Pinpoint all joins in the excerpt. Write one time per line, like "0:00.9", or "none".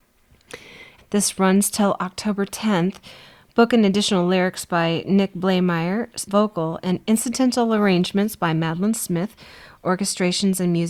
0:01.0
0:06.3